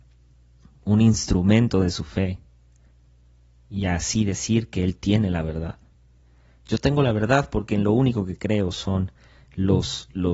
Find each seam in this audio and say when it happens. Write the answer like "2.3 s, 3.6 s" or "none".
none